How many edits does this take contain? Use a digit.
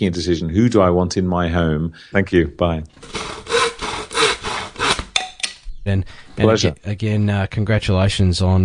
2